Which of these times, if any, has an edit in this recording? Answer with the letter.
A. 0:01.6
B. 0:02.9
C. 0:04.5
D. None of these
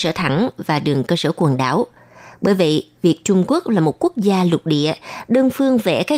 D